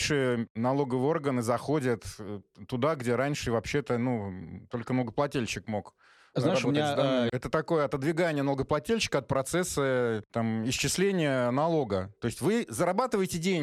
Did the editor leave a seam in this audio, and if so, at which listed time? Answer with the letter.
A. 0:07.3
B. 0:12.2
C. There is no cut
A